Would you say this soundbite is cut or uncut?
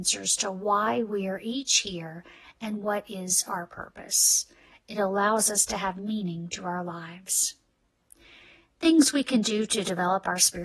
uncut